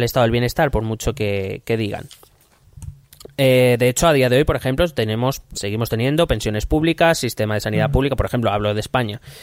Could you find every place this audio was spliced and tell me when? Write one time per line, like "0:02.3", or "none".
0:05.5